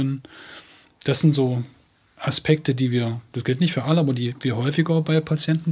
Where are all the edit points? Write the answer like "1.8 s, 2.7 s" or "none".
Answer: none